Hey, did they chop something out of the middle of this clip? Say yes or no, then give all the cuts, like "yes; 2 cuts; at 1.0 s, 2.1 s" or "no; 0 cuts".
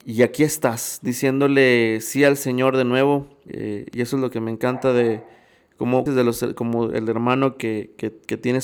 yes; 2 cuts; at 3.5 s, 6.1 s